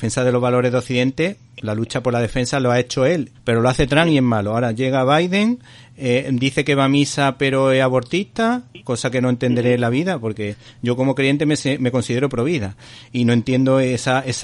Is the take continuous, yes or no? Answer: no